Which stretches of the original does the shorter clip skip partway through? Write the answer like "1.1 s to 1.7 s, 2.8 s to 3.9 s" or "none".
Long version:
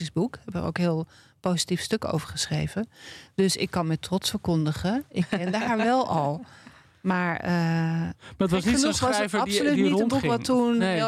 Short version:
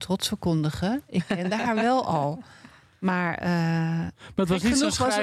none